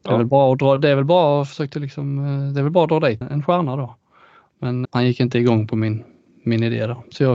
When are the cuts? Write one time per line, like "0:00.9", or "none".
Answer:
0:03.2
0:04.9

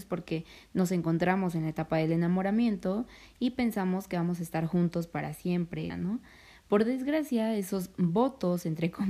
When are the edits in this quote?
0:05.9

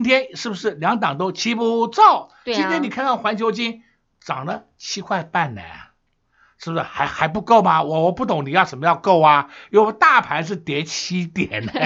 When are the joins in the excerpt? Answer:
none

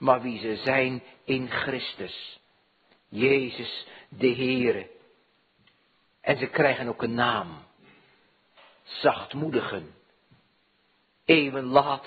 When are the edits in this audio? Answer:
none

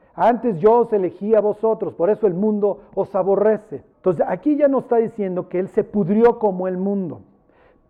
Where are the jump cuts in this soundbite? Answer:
0:03.9

